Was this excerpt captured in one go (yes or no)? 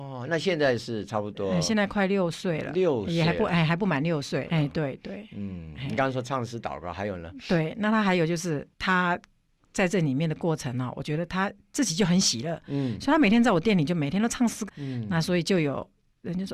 no